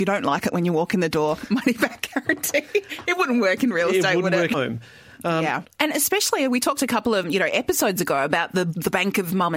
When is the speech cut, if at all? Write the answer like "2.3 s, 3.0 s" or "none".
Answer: 4.5 s, 5.7 s, 7.2 s